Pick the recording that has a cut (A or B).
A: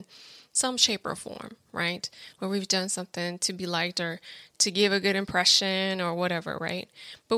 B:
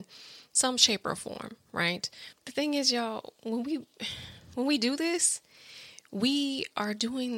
B